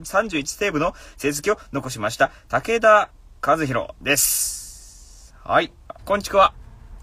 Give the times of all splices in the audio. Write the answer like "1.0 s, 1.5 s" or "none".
6.0 s